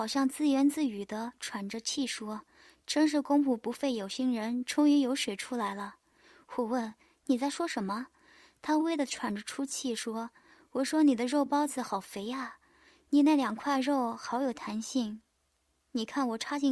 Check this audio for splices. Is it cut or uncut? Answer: cut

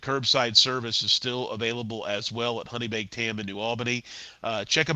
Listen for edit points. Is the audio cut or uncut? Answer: uncut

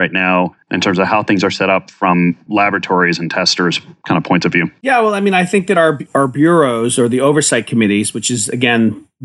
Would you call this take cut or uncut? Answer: uncut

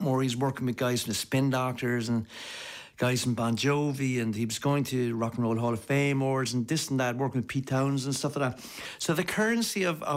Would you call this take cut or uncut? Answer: uncut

